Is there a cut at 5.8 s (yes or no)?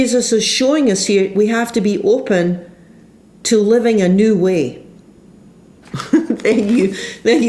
yes